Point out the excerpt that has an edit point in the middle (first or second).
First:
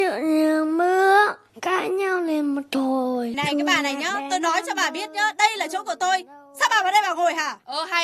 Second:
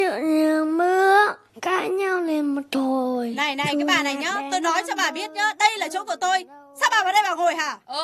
first